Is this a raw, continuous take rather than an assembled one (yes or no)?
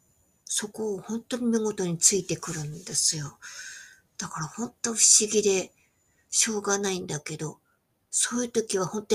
yes